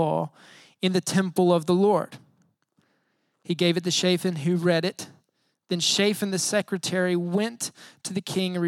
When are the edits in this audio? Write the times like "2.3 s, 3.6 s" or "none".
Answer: none